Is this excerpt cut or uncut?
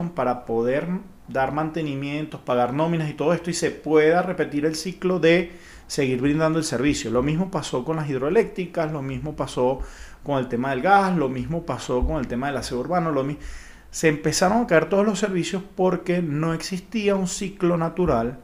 uncut